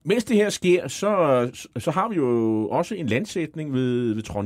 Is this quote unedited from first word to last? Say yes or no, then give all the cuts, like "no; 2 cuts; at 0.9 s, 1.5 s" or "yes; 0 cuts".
yes; 0 cuts